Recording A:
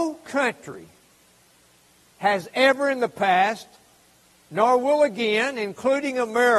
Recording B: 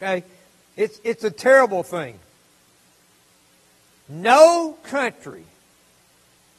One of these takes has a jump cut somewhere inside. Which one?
B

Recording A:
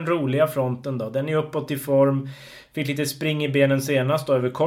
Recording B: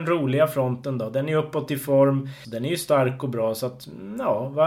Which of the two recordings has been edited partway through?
B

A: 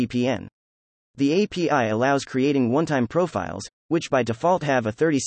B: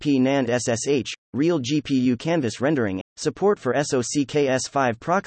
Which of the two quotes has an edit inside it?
B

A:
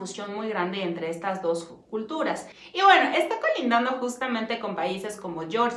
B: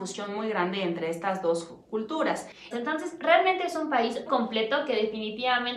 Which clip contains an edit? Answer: B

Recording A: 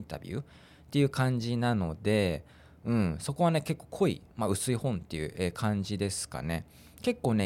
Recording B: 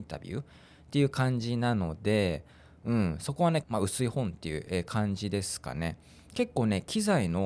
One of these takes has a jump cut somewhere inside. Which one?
B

